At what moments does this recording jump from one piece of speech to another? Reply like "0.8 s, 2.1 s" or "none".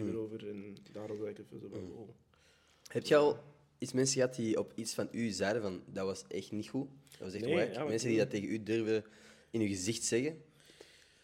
none